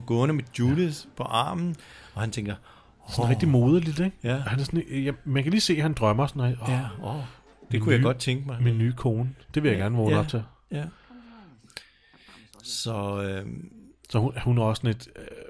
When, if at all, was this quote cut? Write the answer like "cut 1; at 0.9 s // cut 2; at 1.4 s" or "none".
none